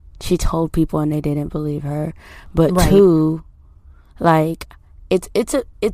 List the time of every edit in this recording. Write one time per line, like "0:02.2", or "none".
none